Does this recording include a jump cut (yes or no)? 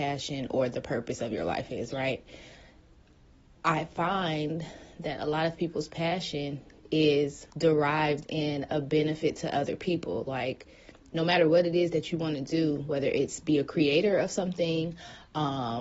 yes